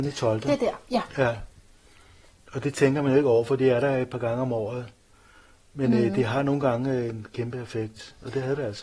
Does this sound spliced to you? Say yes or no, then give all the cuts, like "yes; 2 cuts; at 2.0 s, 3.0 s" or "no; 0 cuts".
no; 0 cuts